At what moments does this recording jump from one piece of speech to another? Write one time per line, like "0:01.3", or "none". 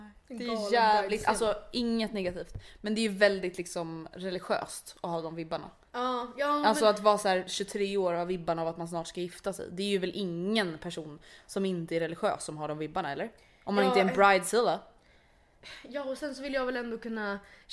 0:04.1